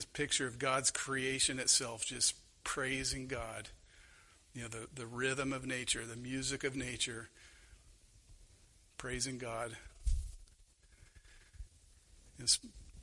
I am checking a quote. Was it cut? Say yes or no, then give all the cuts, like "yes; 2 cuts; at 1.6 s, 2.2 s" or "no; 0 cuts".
no; 0 cuts